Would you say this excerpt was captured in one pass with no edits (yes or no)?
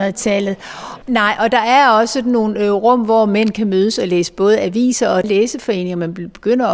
no